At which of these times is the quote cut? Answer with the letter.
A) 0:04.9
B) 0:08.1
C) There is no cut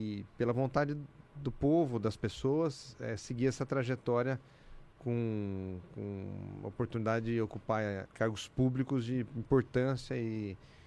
B